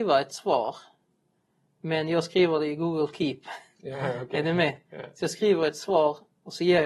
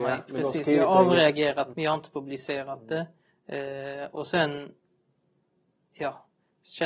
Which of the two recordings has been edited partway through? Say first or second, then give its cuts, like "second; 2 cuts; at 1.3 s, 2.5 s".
second; 1 cut; at 1.7 s